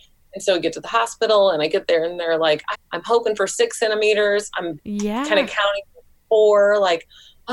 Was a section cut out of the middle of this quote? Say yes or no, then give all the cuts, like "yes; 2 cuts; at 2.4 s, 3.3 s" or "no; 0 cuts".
yes; 1 cut; at 2.7 s